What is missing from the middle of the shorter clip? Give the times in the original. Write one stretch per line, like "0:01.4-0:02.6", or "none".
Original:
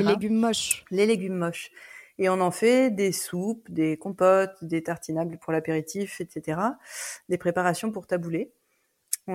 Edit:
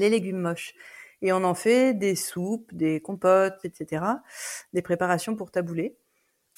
0:04.6-0:06.2